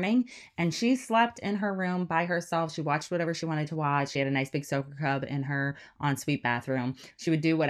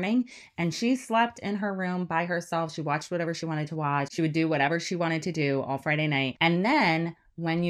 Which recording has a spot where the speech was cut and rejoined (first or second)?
second